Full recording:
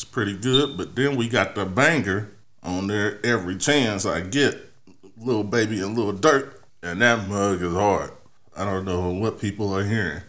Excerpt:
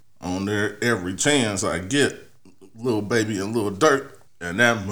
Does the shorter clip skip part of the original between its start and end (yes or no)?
no